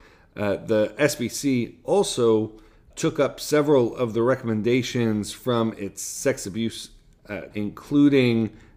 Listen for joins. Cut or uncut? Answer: cut